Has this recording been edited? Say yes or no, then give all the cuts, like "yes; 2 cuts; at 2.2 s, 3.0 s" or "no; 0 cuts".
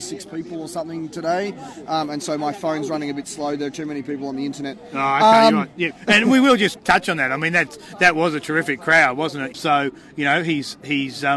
yes; 1 cut; at 9.5 s